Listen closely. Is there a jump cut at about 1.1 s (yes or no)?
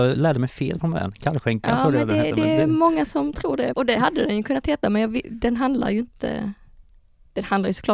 no